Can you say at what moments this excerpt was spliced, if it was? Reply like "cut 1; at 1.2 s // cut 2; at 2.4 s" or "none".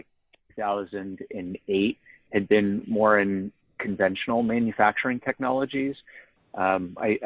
cut 1; at 6.4 s

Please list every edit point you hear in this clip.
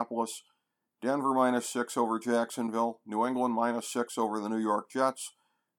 none

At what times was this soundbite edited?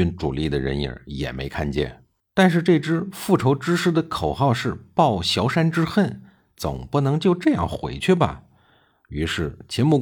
cut 1; at 2.2 s

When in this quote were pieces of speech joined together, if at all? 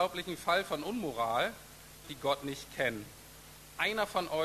cut 1; at 2.0 s

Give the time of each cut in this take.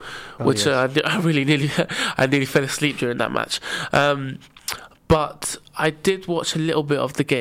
none

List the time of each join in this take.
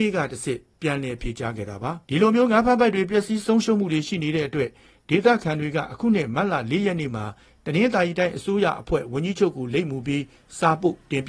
cut 1; at 2.0 s

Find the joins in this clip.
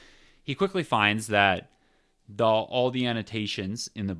none

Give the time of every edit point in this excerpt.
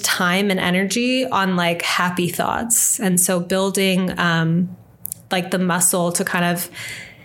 none

